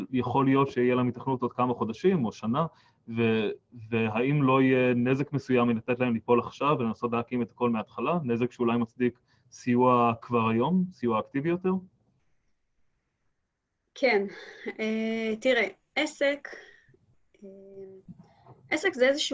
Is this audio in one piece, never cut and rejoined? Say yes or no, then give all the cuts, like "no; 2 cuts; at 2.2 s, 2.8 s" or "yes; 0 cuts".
yes; 0 cuts